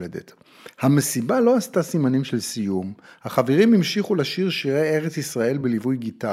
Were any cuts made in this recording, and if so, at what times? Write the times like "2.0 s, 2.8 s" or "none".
none